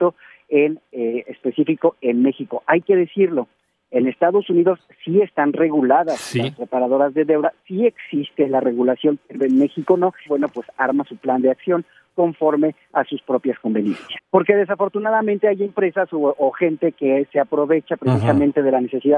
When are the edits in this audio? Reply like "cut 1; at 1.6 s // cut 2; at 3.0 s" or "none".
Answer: cut 1; at 10.3 s // cut 2; at 14.2 s